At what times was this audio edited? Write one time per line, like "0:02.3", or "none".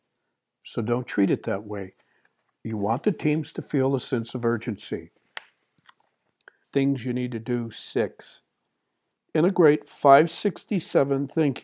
0:06.6